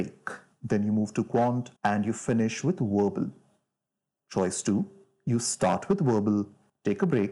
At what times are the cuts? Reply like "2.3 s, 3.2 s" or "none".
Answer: 1.8 s